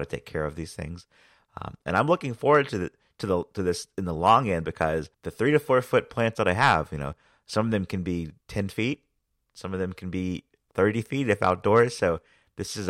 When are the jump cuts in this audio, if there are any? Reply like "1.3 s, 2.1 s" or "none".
5.1 s, 8.4 s